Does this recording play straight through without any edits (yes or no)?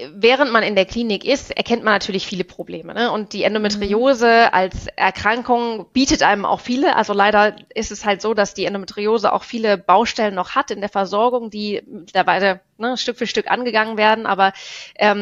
yes